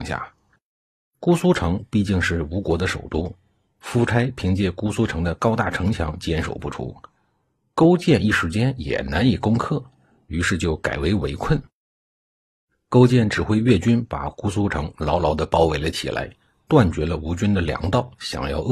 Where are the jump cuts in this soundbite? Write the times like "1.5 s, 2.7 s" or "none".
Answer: none